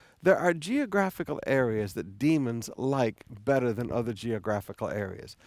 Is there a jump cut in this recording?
no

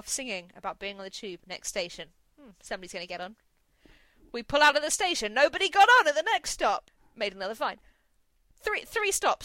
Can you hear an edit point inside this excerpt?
no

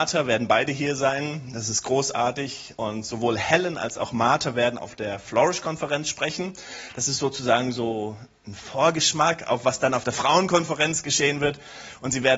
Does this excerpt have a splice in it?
no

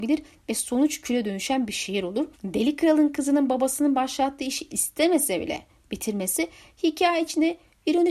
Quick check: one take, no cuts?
no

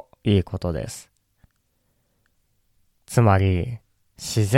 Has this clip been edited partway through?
yes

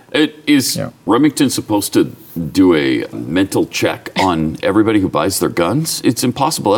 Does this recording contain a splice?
yes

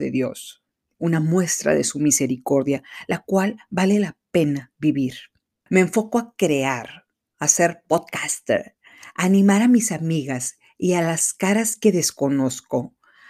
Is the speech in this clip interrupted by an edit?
yes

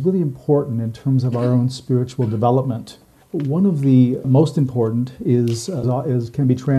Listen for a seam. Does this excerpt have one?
yes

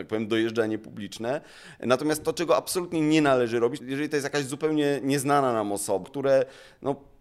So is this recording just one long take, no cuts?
no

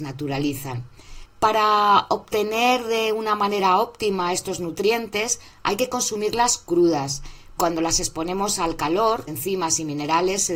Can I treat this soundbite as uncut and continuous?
no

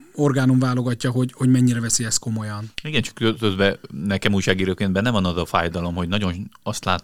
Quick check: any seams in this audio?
no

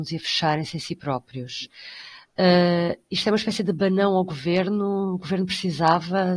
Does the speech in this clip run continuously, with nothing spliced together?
yes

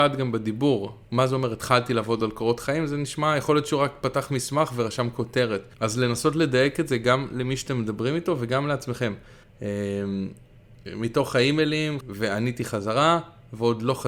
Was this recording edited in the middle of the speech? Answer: yes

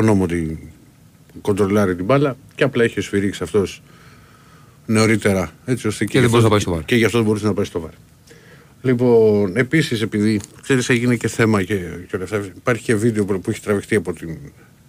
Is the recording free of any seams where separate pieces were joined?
yes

